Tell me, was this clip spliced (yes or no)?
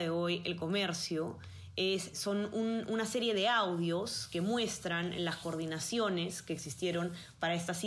yes